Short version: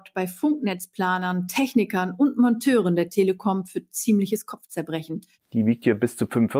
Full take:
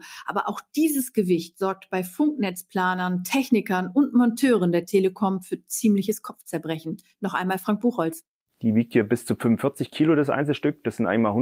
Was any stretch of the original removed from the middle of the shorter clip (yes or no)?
yes